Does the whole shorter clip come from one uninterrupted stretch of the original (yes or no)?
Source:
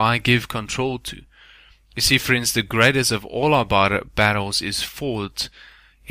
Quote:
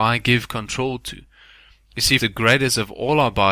no